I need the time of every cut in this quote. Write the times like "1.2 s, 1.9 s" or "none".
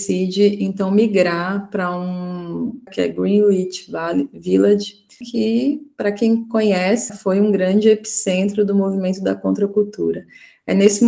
2.9 s, 5.2 s, 7.1 s